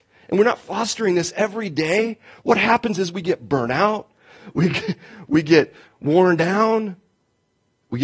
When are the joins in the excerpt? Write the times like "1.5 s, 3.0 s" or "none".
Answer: none